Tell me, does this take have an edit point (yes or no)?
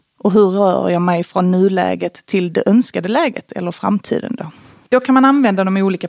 no